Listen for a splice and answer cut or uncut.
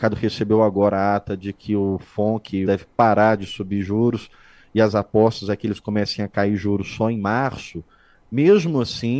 cut